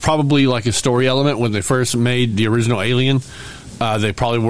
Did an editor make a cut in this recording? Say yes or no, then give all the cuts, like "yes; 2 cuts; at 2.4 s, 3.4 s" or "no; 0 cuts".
yes; 1 cut; at 2.3 s